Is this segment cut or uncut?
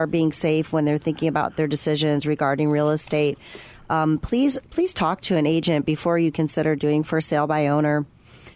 uncut